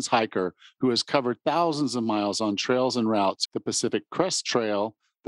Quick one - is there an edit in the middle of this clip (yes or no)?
yes